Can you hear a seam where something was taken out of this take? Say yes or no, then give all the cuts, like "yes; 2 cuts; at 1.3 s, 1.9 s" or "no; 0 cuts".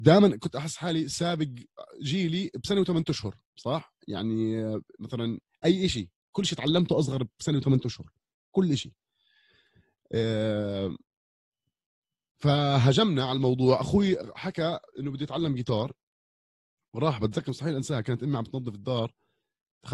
yes; 1 cut; at 3.5 s